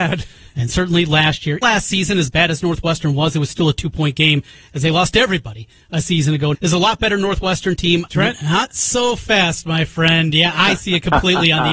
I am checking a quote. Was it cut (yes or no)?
yes